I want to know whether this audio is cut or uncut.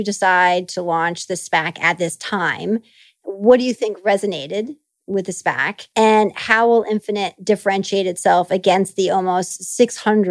uncut